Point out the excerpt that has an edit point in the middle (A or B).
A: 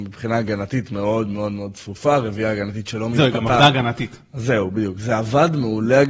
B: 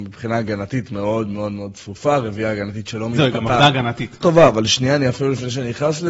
B